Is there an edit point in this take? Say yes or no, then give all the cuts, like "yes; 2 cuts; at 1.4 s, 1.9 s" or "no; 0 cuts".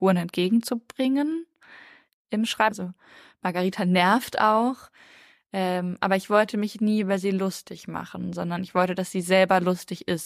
yes; 1 cut; at 2.7 s